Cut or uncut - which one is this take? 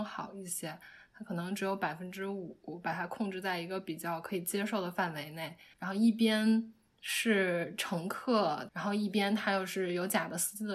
cut